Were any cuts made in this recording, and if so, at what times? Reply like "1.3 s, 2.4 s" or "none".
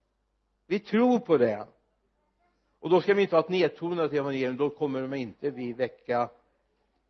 none